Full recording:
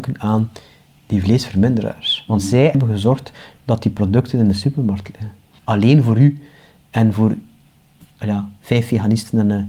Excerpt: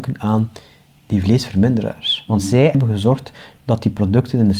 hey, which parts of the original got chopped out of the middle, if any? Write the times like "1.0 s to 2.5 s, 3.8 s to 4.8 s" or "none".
none